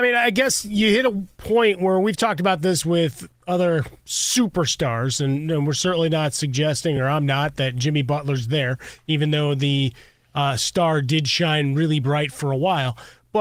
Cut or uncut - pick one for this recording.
uncut